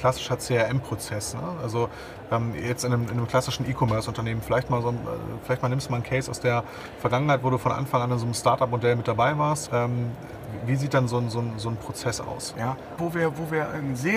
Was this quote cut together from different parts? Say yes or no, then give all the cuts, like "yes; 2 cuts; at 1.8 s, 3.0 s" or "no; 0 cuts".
yes; 2 cuts; at 9.7 s, 13.0 s